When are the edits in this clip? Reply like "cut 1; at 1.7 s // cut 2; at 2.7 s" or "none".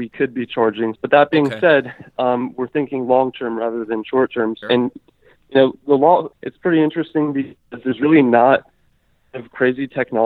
cut 1; at 1.0 s // cut 2; at 4.6 s // cut 3; at 6.3 s